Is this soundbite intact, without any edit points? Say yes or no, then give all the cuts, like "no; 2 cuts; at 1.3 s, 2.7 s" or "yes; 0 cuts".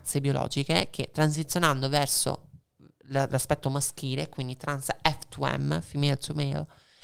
yes; 0 cuts